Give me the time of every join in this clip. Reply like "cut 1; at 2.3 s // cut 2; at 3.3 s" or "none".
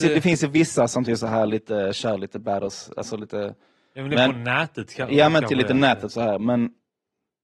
none

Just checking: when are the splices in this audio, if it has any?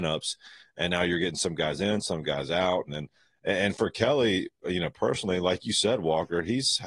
cut 1; at 2.9 s

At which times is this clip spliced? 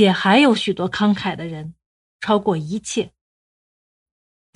cut 1; at 2.1 s

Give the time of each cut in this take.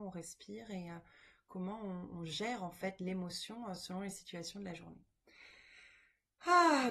none

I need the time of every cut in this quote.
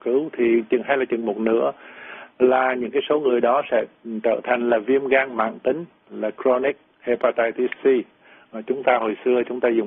none

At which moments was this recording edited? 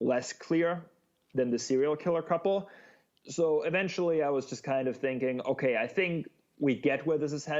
none

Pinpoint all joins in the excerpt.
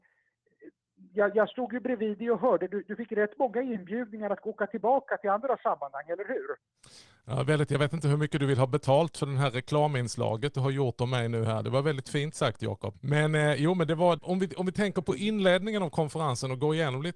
cut 1; at 12.9 s // cut 2; at 14.2 s

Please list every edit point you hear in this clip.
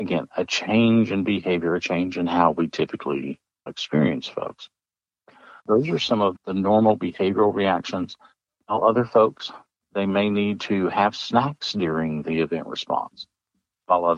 cut 1; at 5.6 s // cut 2; at 8.6 s

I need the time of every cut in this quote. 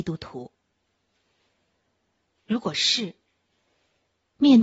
cut 1; at 2.4 s

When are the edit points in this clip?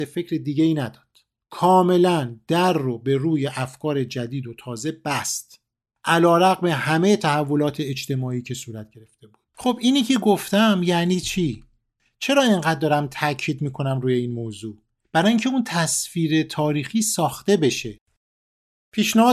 cut 1; at 9.5 s

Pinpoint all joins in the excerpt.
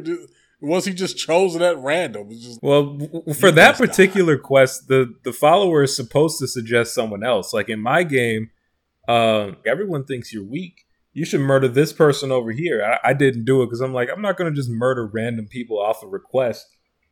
cut 1; at 2.6 s // cut 2; at 9.6 s

